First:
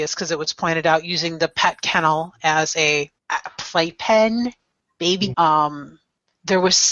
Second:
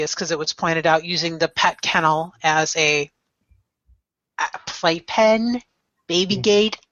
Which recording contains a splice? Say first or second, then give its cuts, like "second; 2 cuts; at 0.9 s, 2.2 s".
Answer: first; 2 cuts; at 3.2 s, 5.3 s